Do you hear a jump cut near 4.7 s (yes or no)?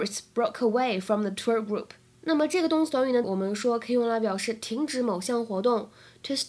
no